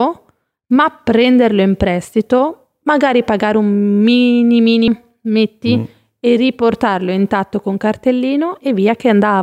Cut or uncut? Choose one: cut